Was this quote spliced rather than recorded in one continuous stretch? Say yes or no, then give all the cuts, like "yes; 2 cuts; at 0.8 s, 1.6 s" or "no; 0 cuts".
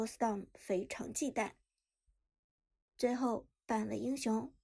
no; 0 cuts